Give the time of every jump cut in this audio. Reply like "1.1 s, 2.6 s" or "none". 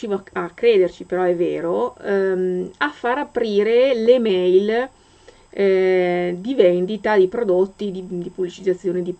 none